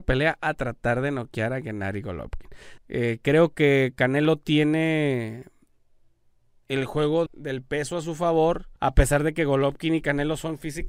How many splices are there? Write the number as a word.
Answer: three